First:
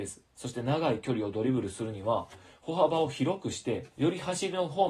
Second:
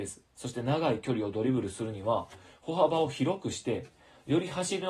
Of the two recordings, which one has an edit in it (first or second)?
first